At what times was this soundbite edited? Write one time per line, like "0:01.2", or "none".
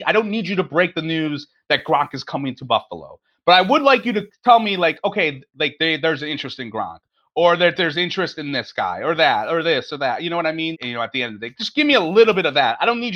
0:10.7